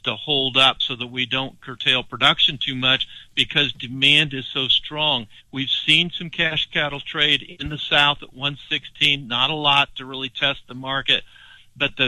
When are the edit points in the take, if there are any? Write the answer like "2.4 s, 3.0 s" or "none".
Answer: 5.4 s